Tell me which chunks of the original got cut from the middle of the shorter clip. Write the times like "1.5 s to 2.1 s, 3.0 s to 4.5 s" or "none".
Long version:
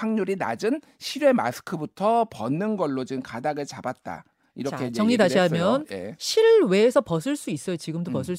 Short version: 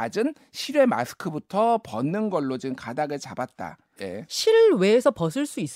4.4 s to 5.9 s